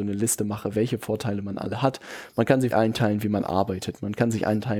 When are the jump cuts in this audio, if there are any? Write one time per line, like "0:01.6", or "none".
0:02.7

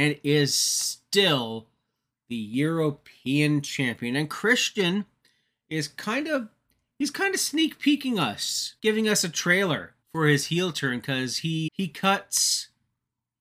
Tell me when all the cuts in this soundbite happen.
0:08.8
0:10.0
0:11.7

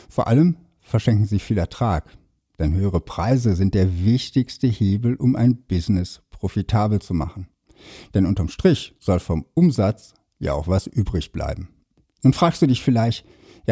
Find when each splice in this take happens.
none

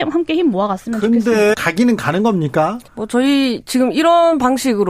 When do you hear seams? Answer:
0:01.5
0:02.9

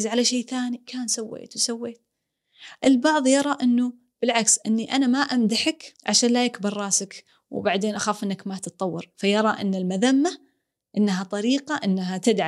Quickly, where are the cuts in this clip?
0:06.0

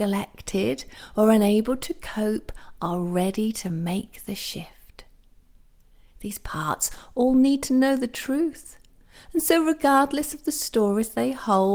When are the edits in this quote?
none

